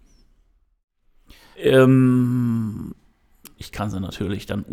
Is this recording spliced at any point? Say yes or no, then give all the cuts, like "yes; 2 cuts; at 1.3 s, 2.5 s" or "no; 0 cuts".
yes; 2 cuts; at 1.5 s, 3.6 s